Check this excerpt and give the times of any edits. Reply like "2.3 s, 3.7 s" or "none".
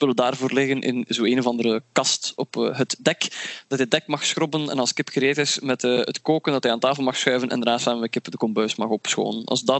none